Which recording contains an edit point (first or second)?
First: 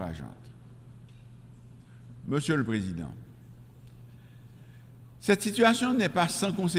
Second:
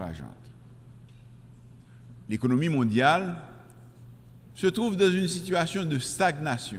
second